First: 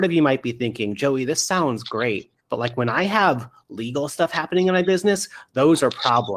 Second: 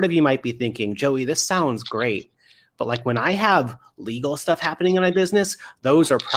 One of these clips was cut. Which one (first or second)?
first